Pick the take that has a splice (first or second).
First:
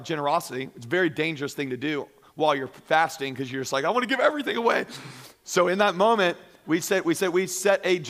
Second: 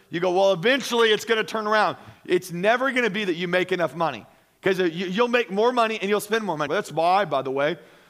second